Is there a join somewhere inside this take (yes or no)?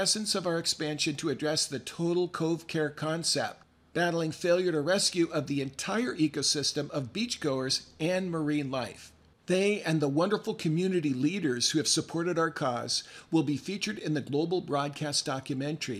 yes